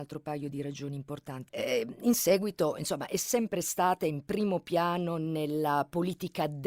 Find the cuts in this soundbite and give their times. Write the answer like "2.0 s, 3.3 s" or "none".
1.5 s